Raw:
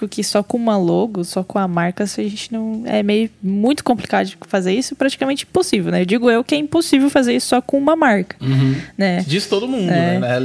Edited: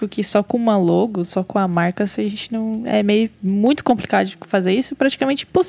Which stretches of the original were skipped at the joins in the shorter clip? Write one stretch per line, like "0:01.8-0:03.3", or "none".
none